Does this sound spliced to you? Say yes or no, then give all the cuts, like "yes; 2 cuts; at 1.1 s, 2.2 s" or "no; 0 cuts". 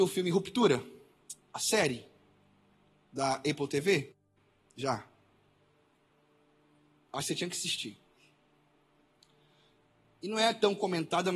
no; 0 cuts